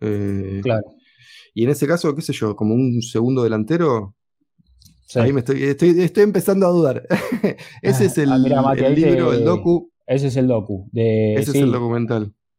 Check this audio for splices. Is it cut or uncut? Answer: cut